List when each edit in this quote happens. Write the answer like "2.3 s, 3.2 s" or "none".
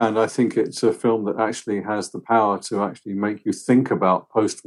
none